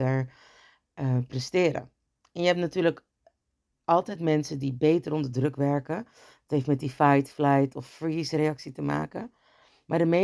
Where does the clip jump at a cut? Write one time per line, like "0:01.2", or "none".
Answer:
none